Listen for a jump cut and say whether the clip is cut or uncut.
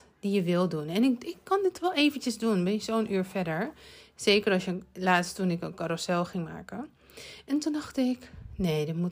uncut